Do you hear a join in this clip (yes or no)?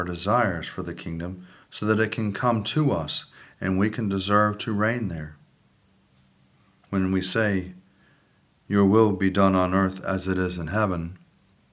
no